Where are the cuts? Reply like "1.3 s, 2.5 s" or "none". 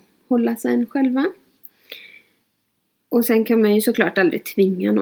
none

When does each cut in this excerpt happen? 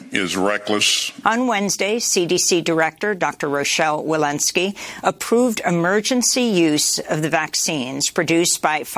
1.2 s

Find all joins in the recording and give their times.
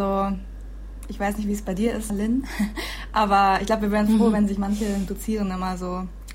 2.1 s

